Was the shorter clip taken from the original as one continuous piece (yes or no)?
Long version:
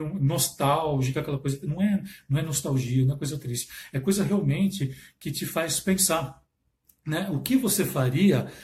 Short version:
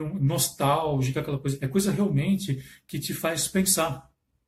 no